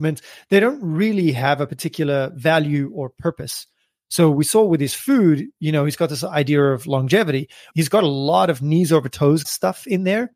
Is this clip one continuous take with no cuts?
no; 2 cuts; at 7.7 s, 9.4 s

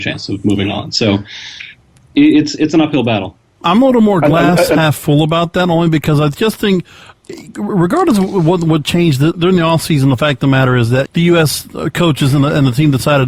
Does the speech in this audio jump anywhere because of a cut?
yes; 2 cuts; at 9.3 s, 11.1 s

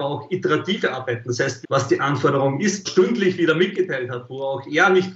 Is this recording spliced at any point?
yes; 2 cuts; at 1.6 s, 2.8 s

